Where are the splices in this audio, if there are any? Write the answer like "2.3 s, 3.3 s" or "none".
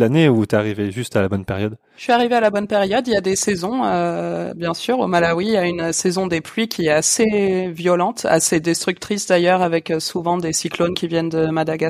none